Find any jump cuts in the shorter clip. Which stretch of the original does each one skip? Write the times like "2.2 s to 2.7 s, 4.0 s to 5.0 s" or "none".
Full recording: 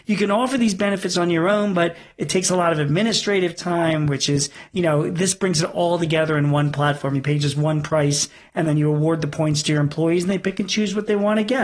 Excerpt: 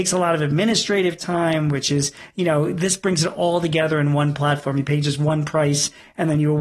none